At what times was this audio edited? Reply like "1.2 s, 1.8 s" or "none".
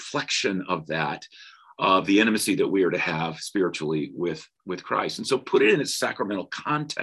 none